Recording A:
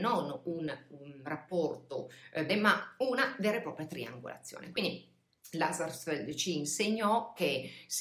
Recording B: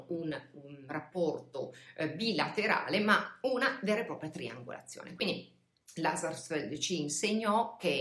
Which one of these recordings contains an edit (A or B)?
A